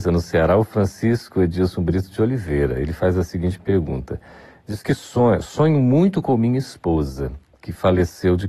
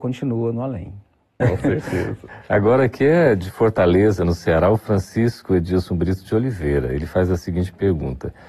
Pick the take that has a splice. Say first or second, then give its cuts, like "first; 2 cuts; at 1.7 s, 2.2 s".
second; 1 cut; at 1.4 s